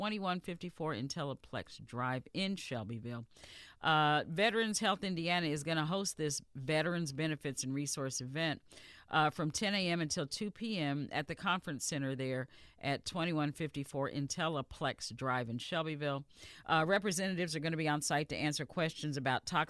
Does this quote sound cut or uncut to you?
uncut